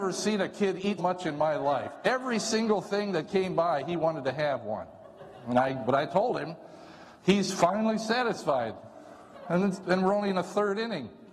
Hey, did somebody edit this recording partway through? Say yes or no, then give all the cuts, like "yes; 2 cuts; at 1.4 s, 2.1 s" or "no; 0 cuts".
yes; 2 cuts; at 1.0 s, 7.2 s